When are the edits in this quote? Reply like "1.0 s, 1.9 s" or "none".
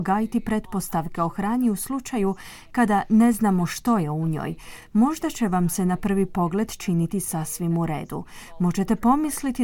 none